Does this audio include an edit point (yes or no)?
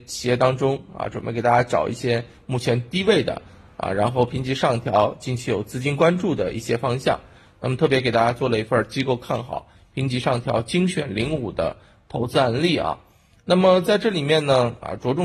no